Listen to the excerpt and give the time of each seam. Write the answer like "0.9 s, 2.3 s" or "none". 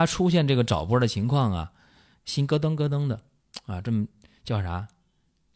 none